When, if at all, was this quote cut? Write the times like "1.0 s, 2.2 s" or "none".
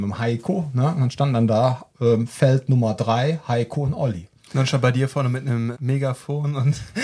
5.7 s